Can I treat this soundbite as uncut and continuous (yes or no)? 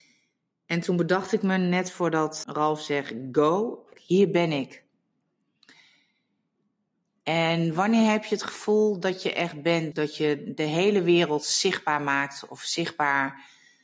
no